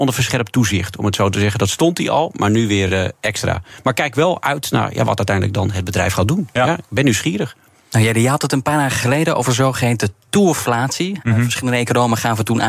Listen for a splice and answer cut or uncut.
uncut